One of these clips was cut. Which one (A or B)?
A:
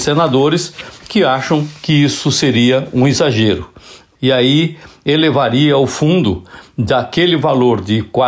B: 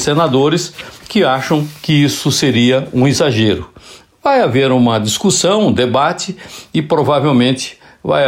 A